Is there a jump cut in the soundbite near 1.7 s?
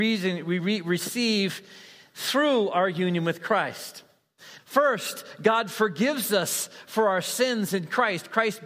no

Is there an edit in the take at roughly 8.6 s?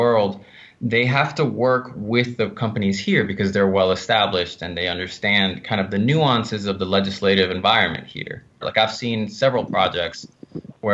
yes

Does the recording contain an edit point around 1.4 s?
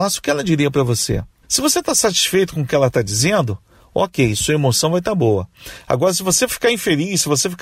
yes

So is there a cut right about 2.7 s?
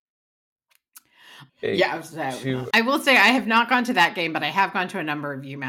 yes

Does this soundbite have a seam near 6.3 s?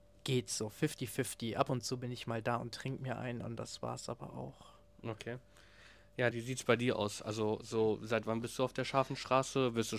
yes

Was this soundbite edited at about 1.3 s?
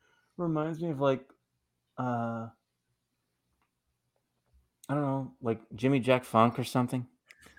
no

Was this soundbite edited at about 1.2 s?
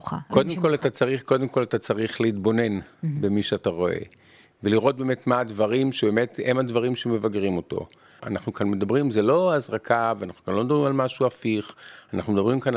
no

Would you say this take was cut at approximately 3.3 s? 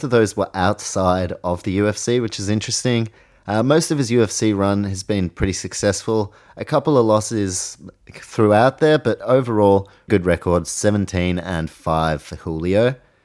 no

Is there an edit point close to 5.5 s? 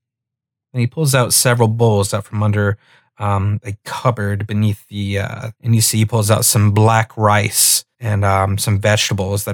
yes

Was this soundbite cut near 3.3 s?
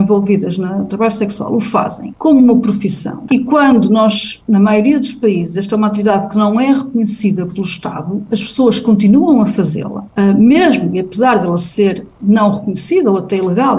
yes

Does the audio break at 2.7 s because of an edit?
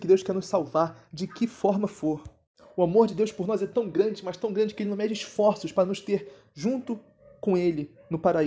no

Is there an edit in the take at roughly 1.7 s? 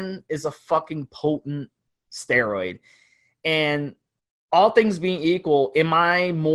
no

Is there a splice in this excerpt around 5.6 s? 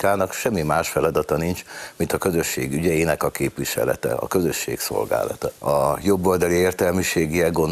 yes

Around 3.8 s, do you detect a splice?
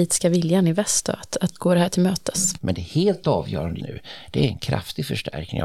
yes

